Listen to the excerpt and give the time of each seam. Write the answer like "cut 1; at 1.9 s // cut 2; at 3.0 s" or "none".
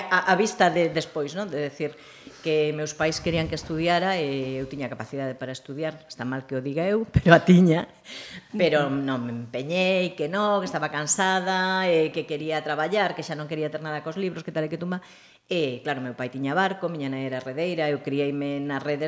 none